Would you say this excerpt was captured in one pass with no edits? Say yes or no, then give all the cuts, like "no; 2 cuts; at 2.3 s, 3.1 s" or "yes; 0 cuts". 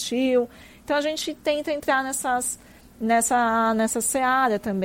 yes; 0 cuts